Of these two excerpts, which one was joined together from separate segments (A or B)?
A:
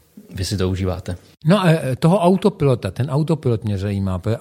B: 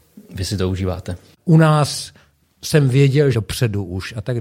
B